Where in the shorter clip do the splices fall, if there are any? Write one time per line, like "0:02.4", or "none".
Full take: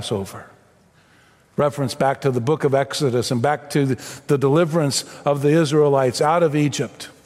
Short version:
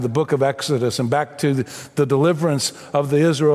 none